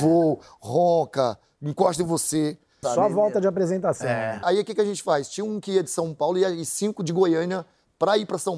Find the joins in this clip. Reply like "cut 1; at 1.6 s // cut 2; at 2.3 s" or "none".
cut 1; at 2.8 s // cut 2; at 4.4 s